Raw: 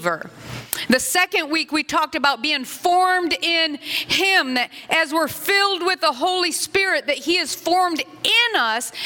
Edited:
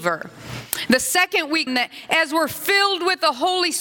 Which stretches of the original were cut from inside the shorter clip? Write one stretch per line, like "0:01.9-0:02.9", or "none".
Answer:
0:01.7-0:04.5